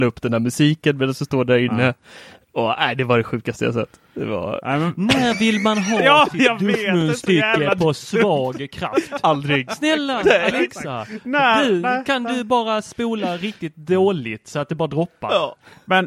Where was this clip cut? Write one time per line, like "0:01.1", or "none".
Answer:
none